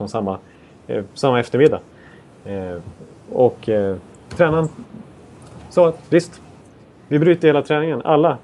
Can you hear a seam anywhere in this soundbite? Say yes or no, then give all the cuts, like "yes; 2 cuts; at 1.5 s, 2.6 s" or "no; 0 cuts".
yes; 2 cuts; at 4.1 s, 6.0 s